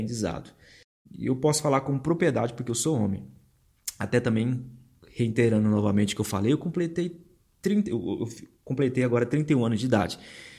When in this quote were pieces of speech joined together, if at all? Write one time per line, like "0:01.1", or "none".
0:01.1